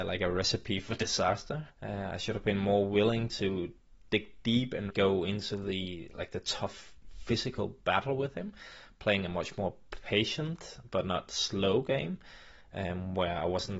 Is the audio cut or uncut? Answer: cut